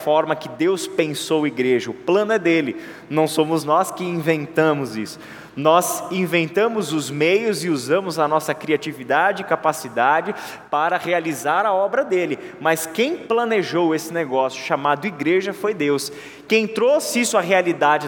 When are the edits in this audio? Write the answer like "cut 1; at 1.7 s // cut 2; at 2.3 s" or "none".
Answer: none

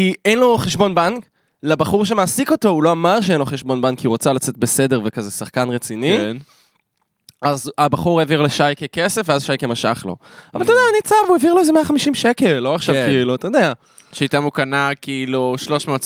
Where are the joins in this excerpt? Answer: none

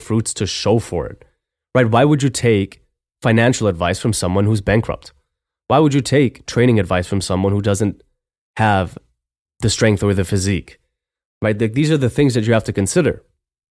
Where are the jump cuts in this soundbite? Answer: cut 1; at 11.3 s

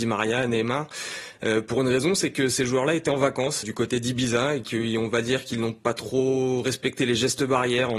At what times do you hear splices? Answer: cut 1; at 3.6 s

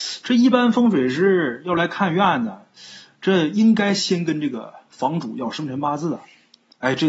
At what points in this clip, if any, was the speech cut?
none

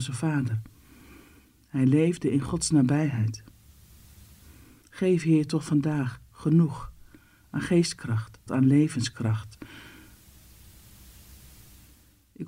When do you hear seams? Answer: cut 1; at 4.8 s // cut 2; at 8.5 s

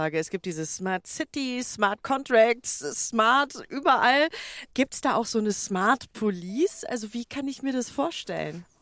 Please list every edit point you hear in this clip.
none

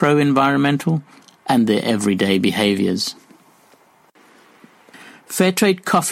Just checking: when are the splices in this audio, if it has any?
none

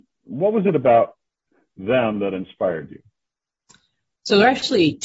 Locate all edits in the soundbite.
none

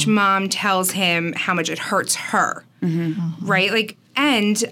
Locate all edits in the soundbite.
none

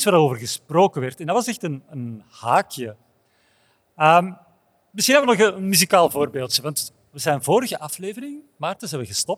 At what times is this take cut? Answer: none

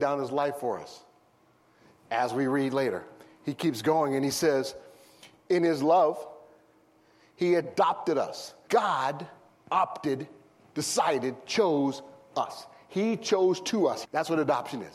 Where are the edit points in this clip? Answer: cut 1; at 8.7 s // cut 2; at 14.1 s

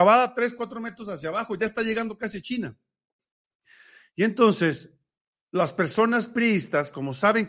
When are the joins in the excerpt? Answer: none

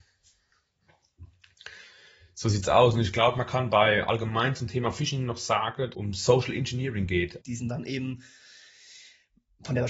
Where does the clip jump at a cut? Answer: cut 1; at 5.9 s // cut 2; at 7.4 s

